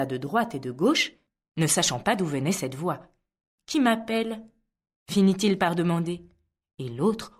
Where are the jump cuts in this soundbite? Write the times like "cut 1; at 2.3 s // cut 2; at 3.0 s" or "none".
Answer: none

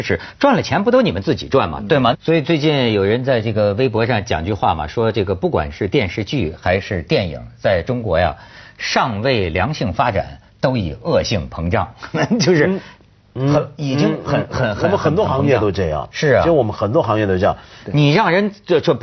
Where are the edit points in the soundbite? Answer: cut 1; at 2.1 s // cut 2; at 17.8 s

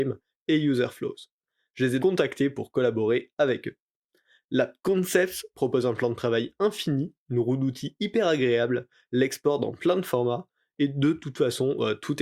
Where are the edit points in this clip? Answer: cut 1; at 2.0 s

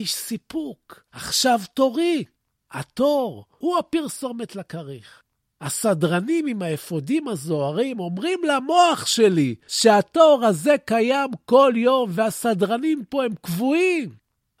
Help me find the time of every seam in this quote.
cut 1; at 2.6 s

